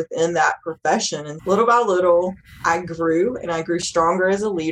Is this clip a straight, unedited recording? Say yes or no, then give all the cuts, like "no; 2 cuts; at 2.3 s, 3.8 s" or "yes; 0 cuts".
no; 1 cut; at 1.4 s